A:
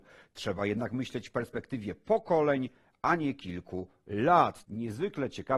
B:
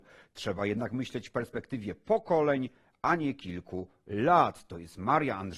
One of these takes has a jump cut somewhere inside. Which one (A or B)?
A